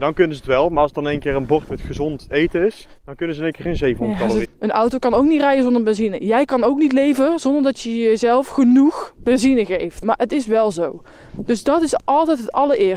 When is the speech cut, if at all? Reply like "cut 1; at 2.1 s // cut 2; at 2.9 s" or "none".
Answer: cut 1; at 3.0 s // cut 2; at 4.4 s // cut 3; at 10.0 s